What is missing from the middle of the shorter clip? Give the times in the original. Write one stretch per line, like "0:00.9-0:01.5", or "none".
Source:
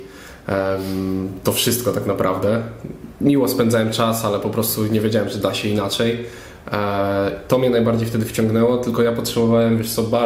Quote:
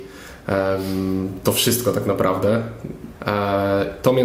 0:03.2-0:06.6